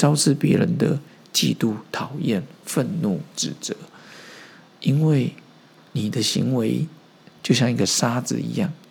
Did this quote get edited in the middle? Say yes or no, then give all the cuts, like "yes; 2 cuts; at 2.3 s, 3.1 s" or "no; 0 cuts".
no; 0 cuts